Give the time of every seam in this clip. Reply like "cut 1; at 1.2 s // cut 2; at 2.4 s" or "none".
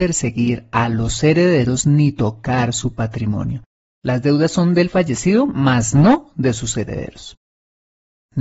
cut 1; at 3.9 s